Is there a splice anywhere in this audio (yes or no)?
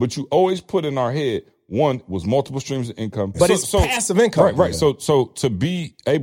yes